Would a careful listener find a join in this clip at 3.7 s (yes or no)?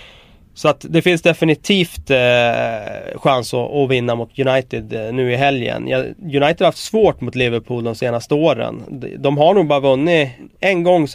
no